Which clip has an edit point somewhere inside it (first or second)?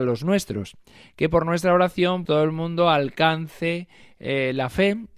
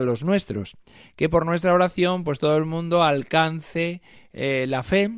first